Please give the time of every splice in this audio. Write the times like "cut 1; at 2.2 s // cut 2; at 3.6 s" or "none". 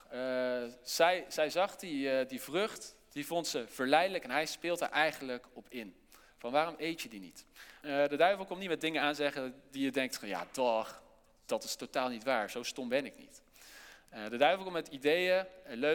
cut 1; at 7.8 s